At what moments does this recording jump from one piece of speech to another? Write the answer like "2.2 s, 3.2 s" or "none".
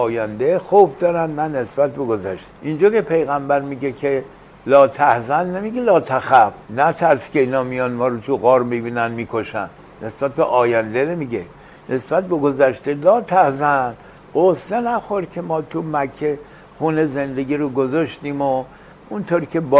2.5 s, 6.6 s